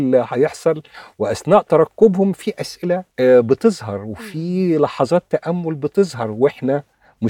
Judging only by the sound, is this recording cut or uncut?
cut